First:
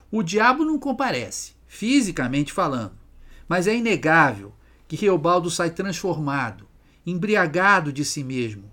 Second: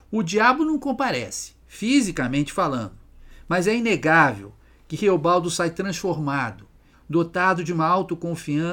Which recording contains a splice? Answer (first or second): second